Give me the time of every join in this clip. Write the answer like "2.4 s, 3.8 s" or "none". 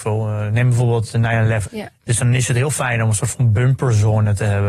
1.6 s